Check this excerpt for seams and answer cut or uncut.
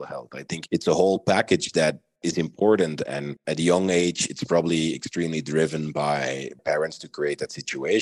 uncut